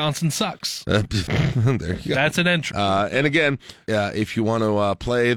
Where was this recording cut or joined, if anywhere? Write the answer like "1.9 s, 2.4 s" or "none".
2.7 s, 3.9 s

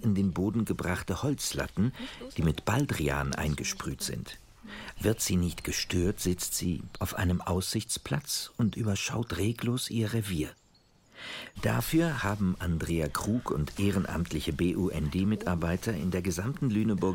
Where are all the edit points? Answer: 5.0 s, 6.9 s, 11.5 s

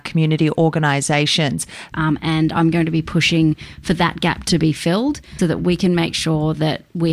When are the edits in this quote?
1.9 s, 5.4 s

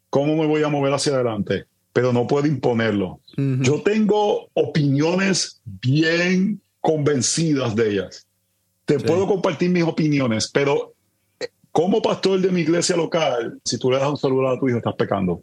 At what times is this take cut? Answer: 3.2 s, 13.7 s

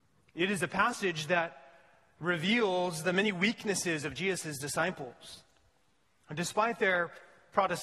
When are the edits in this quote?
none

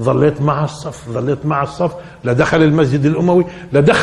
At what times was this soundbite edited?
none

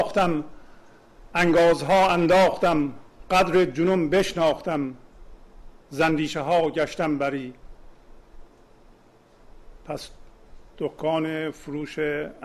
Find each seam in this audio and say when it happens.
1.3 s

